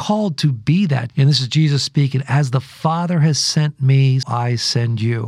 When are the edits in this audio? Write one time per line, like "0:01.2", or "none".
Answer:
0:01.1
0:04.2

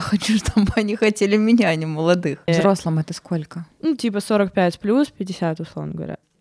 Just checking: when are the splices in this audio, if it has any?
0:02.5

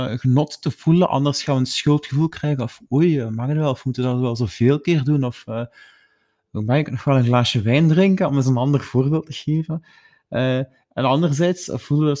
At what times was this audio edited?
none

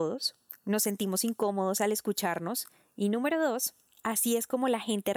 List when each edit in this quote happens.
none

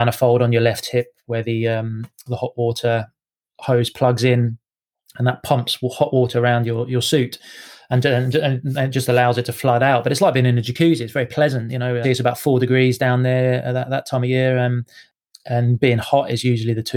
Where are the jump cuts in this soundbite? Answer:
0:12.0

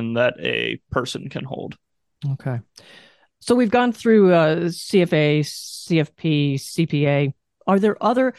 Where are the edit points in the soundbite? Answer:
none

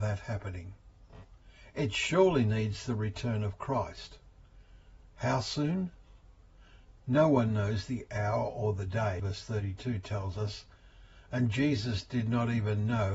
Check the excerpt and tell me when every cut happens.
0:09.2

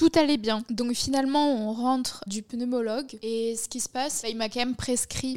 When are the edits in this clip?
0:02.3
0:04.2

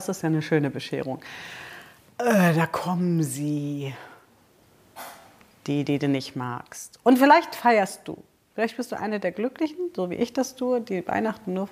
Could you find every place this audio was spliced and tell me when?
none

